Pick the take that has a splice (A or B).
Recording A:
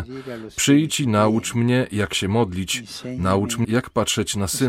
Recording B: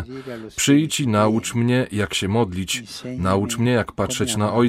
A